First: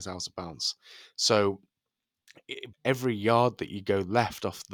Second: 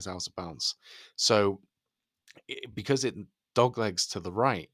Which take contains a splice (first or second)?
first